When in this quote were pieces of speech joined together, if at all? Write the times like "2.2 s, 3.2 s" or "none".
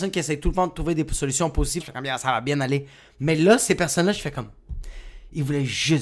1.8 s